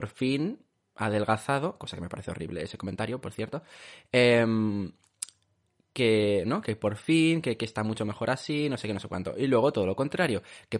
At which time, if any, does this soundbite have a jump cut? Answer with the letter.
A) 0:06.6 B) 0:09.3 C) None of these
C